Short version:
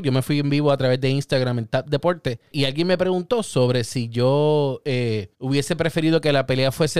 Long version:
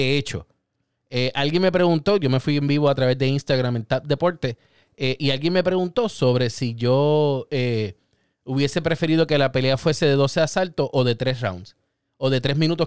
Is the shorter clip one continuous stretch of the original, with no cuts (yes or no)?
no